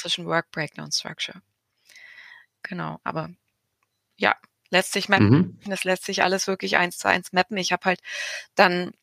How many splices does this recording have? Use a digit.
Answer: 1